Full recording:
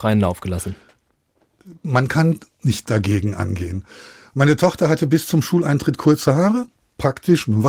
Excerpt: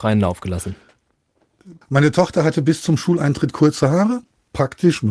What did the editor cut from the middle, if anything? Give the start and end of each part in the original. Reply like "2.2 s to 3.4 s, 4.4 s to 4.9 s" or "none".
1.8 s to 4.3 s